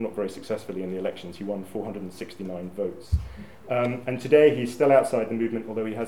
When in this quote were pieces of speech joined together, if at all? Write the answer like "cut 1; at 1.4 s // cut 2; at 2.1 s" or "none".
none